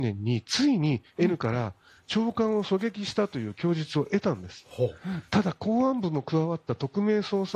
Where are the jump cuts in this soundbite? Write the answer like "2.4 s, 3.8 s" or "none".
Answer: 5.3 s